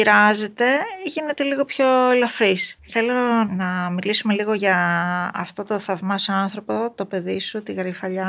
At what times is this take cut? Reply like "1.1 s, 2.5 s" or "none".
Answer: 2.8 s